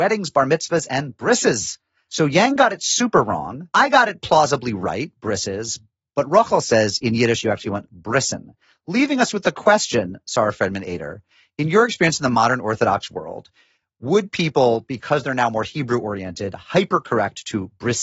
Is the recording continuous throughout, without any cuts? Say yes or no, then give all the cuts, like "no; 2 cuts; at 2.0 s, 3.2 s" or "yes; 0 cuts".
no; 1 cut; at 2.1 s